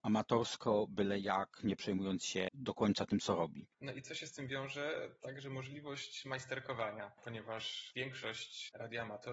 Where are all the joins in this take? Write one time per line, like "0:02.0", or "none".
0:03.7